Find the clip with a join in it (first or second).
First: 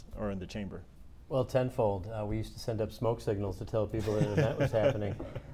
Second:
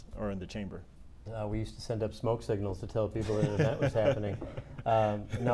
second